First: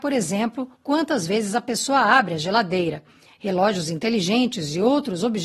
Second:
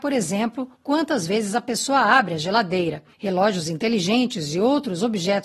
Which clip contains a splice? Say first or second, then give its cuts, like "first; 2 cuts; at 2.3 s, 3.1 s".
second; 1 cut; at 3.1 s